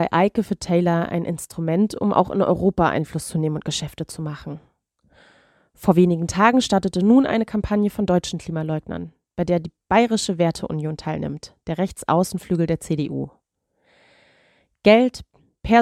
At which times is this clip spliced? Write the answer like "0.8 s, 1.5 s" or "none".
none